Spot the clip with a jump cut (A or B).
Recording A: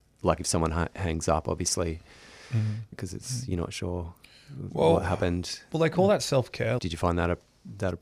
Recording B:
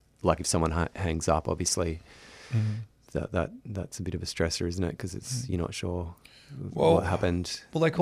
A